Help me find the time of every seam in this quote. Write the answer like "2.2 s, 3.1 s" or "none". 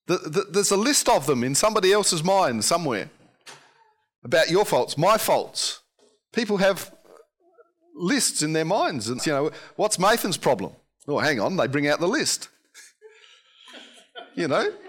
9.2 s